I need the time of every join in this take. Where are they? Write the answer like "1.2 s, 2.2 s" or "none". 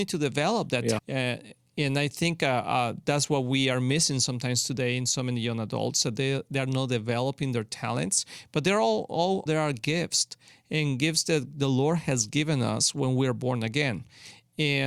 1.0 s, 9.5 s